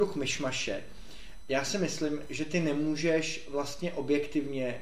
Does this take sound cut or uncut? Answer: cut